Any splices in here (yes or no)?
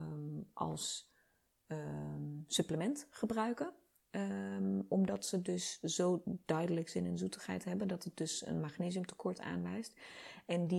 no